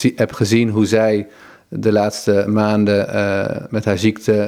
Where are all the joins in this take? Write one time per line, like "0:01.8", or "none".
none